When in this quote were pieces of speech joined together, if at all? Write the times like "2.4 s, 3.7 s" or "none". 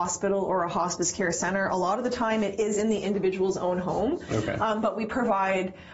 none